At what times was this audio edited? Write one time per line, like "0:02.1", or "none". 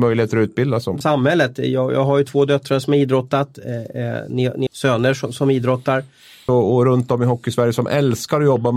0:01.0
0:04.7
0:06.5